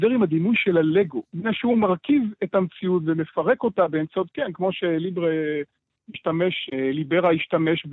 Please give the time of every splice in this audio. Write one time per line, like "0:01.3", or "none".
0:01.3
0:06.7